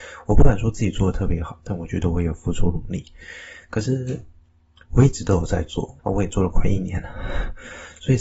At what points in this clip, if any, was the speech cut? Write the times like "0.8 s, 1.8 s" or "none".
4.9 s, 6.0 s